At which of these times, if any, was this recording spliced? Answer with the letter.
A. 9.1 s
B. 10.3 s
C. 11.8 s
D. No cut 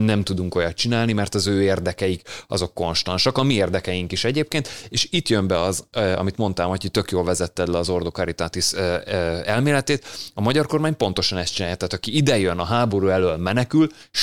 D